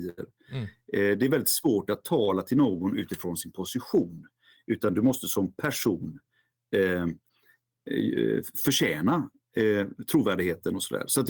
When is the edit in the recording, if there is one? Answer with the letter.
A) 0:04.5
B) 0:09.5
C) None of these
C